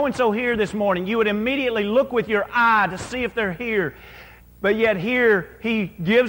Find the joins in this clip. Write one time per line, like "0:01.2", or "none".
0:04.4